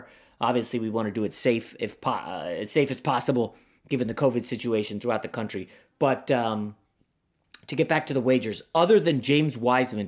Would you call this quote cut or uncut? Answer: uncut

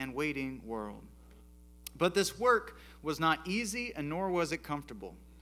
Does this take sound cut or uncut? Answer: uncut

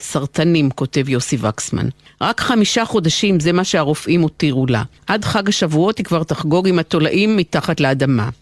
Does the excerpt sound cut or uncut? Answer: uncut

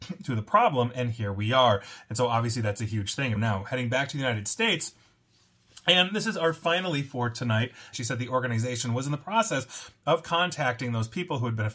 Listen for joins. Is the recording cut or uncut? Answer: cut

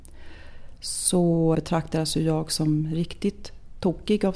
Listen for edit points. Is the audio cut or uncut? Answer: cut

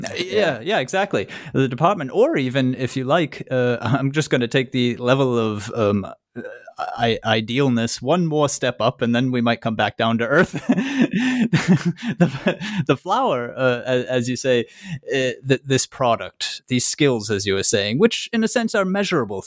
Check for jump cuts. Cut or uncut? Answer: uncut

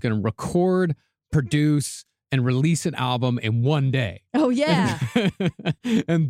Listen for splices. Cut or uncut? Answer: uncut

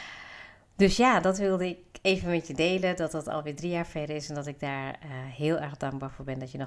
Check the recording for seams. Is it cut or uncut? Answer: uncut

